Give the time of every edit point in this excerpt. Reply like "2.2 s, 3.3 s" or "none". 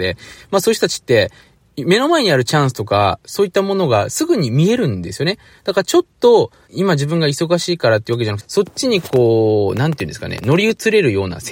6.7 s, 8.4 s